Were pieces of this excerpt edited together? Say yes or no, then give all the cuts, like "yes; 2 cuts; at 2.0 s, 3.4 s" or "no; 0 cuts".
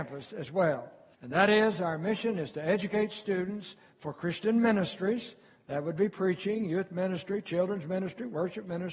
yes; 1 cut; at 1.1 s